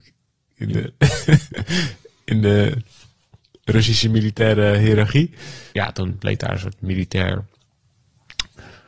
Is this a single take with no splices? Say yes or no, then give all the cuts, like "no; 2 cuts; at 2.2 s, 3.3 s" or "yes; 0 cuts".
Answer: no; 1 cut; at 5.7 s